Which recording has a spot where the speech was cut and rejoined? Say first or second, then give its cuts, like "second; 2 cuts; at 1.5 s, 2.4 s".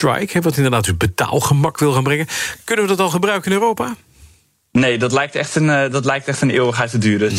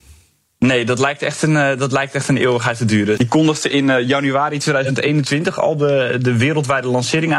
second; 1 cut; at 3.2 s